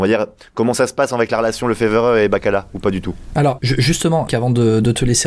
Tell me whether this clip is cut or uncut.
cut